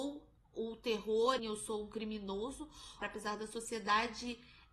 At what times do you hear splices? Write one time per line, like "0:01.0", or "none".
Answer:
0:01.4
0:03.0